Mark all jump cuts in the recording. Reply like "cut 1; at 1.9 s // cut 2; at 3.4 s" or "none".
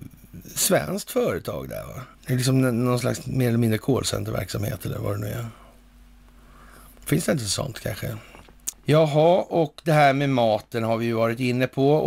cut 1; at 2.1 s // cut 2; at 8.7 s